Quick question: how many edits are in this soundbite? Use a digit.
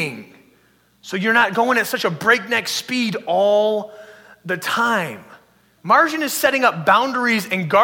1